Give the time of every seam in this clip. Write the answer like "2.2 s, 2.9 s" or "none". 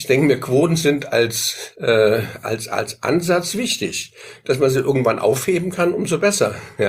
none

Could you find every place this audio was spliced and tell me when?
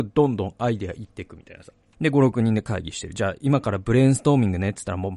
1.9 s

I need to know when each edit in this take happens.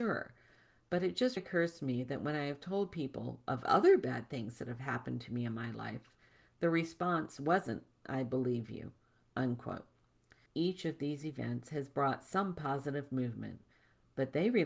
1.4 s, 10.5 s

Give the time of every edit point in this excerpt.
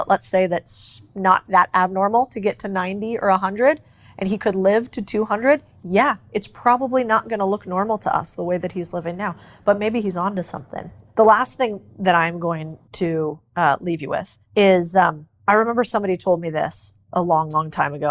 none

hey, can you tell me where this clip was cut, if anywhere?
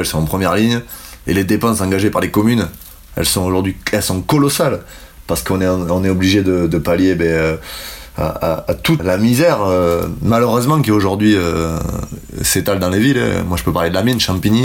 9.0 s

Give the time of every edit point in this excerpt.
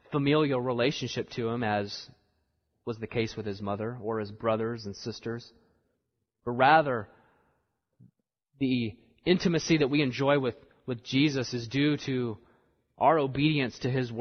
none

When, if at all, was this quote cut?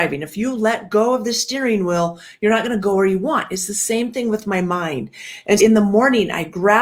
5.6 s

